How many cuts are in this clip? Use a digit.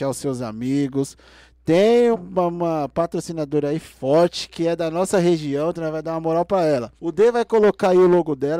2